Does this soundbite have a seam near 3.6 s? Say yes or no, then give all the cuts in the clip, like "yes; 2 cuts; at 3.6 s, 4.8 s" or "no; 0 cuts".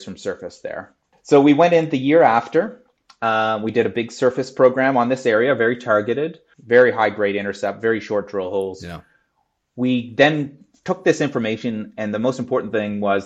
no; 2 cuts; at 1.1 s, 6.5 s